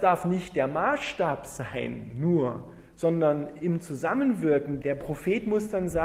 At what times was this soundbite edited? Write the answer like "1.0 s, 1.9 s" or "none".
4.8 s

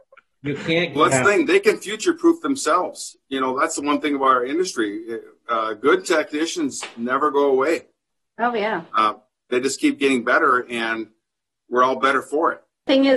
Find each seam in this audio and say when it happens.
none

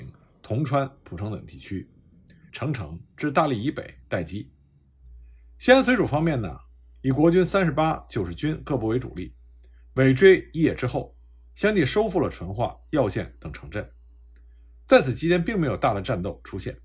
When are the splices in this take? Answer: 2.5 s

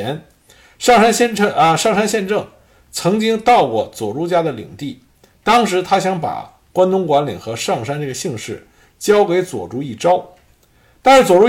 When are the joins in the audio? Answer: none

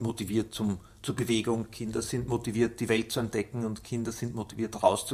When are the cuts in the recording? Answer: none

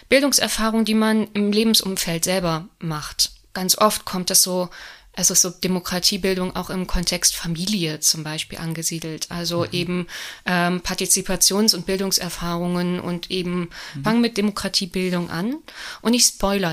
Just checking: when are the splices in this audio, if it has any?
14.0 s

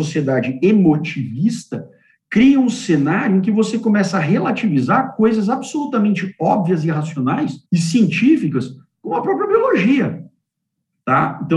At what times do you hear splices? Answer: 7.7 s

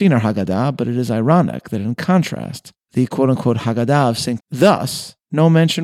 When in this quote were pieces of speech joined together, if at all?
4.4 s

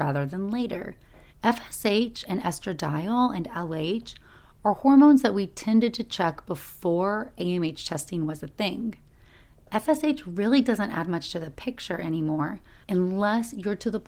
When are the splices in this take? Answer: 1.3 s

